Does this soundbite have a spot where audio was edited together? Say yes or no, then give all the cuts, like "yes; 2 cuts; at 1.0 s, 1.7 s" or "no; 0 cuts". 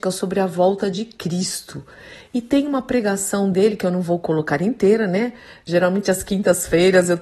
no; 0 cuts